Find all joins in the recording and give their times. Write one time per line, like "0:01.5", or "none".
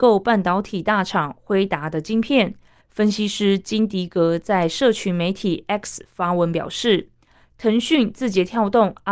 0:02.8